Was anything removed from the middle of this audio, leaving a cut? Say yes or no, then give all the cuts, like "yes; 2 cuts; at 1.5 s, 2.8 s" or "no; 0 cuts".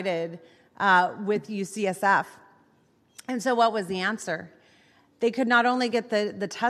no; 0 cuts